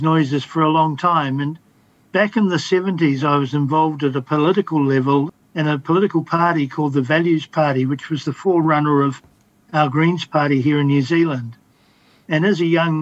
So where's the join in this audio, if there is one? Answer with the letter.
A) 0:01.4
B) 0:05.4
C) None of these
B